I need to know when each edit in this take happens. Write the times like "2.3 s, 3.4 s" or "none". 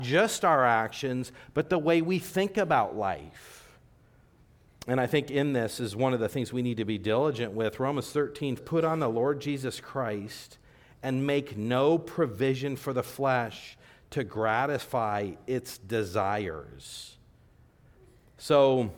8.6 s